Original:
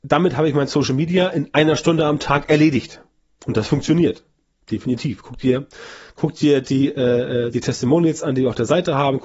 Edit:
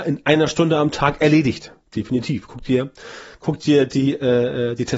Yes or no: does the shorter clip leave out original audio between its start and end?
yes